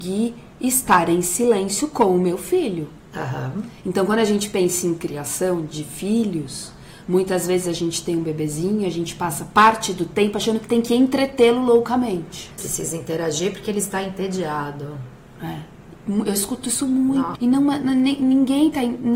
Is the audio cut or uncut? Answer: cut